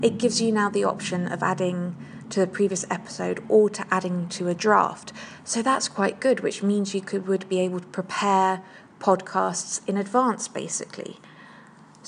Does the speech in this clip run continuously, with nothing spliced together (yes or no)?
yes